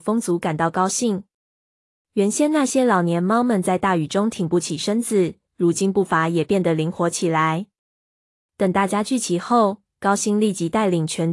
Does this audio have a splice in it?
yes; 1 cut; at 5.5 s

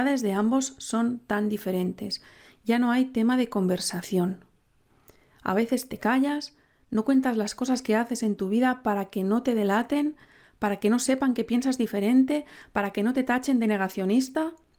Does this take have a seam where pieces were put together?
no; 0 cuts

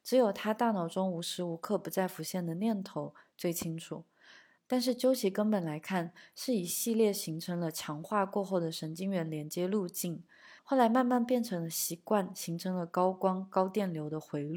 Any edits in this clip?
yes; 2 cuts; at 4.6 s, 10.6 s

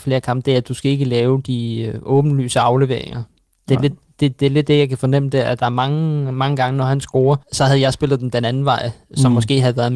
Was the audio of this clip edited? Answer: yes; 1 cut; at 7.4 s

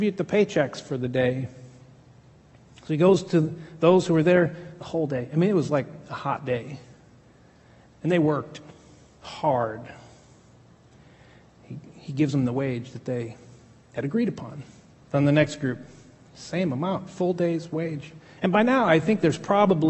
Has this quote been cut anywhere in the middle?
yes; 2 cuts; at 14.9 s, 18.4 s

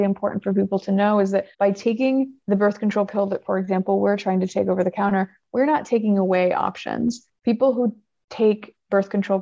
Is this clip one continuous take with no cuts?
no; 1 cut; at 1.5 s

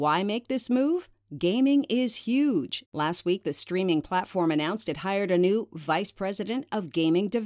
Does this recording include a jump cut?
yes; 1 cut; at 2.9 s

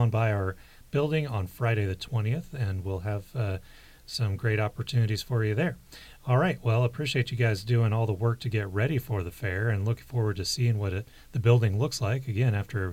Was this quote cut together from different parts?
no; 0 cuts

